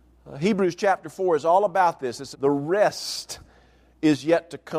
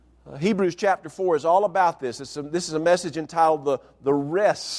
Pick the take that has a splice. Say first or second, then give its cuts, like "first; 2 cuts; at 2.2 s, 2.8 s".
first; 1 cut; at 2.3 s